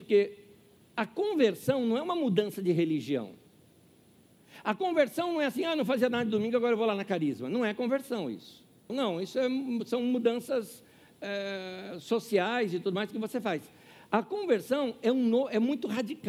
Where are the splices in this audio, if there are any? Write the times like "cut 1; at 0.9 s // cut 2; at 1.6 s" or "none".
cut 1; at 8.9 s